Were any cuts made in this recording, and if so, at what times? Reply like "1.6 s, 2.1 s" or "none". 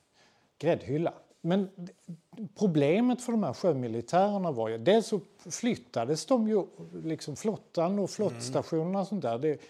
1.3 s